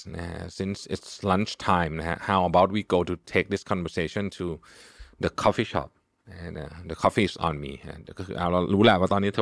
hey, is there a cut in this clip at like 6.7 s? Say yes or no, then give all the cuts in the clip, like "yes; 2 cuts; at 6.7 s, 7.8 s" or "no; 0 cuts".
no; 0 cuts